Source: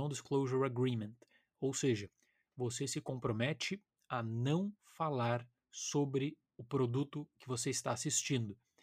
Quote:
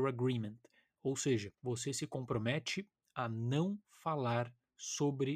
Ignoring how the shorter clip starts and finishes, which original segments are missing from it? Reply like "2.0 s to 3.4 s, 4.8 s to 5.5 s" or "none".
2.1 s to 2.5 s

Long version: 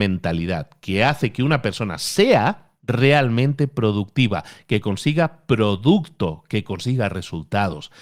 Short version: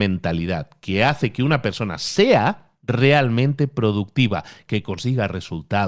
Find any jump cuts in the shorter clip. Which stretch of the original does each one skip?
4.7 s to 6.5 s

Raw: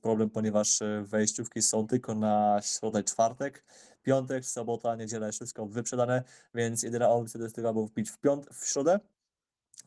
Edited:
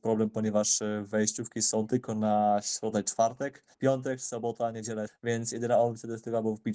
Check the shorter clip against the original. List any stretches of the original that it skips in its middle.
3.7 s to 4.0 s, 5.3 s to 6.4 s

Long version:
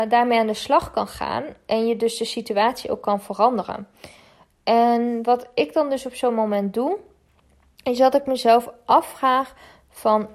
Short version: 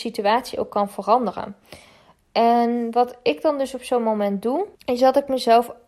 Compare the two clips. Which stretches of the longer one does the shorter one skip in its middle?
7.1 s to 7.7 s

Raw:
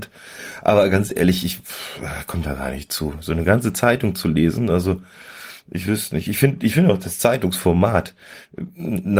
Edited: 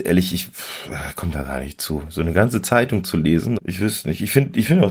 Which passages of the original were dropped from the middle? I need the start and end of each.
4.7 s to 5.6 s

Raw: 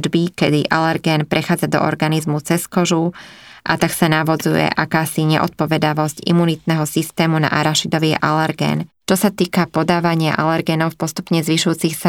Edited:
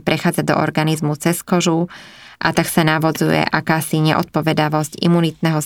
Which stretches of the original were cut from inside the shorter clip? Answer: none

